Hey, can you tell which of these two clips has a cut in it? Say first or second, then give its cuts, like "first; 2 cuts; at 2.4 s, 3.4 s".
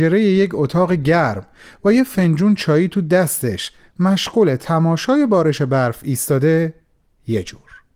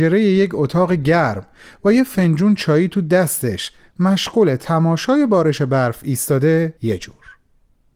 second; 1 cut; at 6.8 s